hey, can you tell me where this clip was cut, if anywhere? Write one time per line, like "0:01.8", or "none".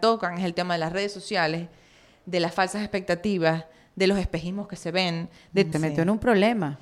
0:05.7